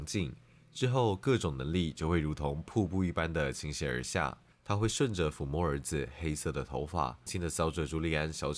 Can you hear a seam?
yes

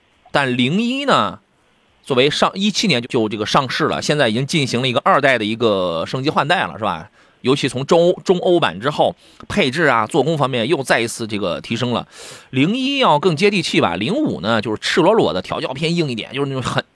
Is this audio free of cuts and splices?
no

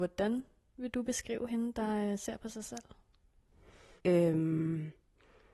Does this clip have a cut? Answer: yes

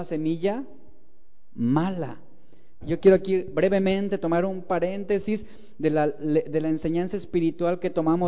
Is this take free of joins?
no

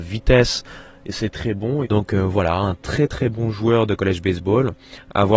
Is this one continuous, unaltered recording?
no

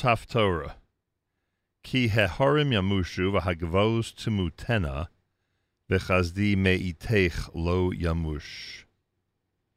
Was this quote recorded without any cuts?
yes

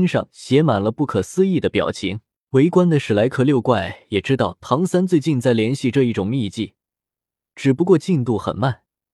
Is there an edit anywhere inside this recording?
yes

